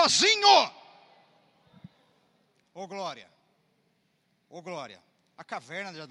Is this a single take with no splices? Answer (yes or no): no